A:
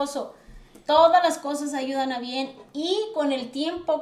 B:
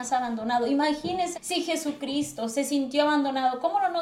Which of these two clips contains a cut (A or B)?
B